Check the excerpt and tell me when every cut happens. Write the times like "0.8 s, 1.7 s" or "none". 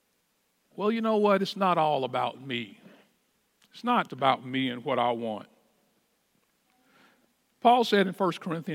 4.1 s